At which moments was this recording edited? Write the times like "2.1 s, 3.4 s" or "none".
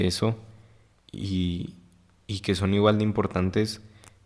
0.9 s